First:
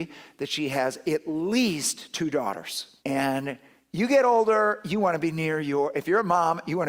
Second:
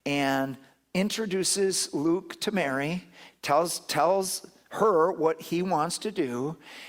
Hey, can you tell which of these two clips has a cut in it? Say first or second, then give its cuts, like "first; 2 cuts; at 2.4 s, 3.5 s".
first; 1 cut; at 3.0 s